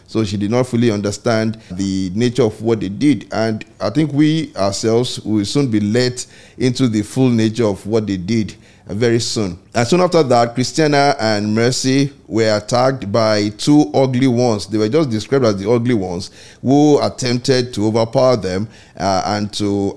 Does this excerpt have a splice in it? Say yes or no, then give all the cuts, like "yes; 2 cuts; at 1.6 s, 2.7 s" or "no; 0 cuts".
yes; 2 cuts; at 1.7 s, 9.6 s